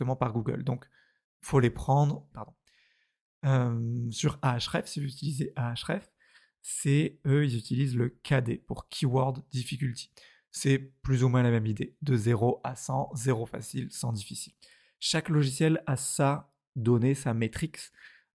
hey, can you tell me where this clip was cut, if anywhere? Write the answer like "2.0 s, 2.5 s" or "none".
2.3 s